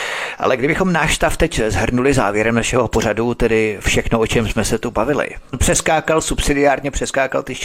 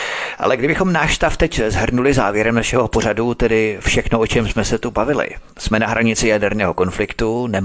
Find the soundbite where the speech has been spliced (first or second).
first